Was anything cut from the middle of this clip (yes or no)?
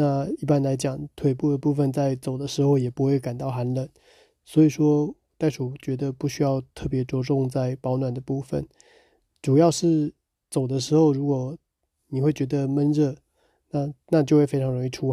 no